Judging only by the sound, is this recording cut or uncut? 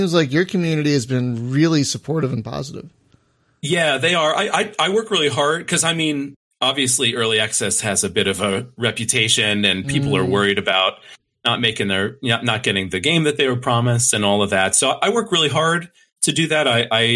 uncut